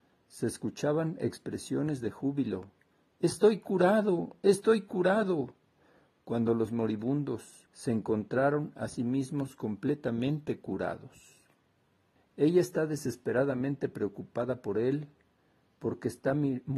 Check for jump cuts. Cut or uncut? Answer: cut